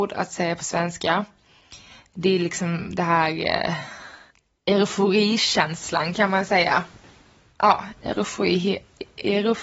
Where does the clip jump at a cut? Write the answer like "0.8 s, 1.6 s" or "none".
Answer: none